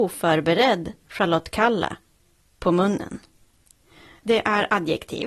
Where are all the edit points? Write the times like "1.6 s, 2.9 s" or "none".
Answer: 4.2 s